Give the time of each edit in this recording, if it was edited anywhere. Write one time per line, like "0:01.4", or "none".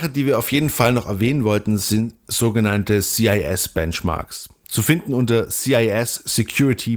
none